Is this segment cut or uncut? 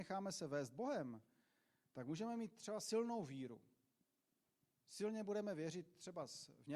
uncut